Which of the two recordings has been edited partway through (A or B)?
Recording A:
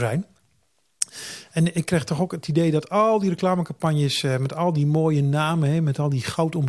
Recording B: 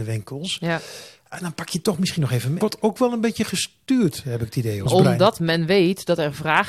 B